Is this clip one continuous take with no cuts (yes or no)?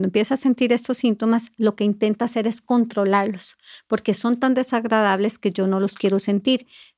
yes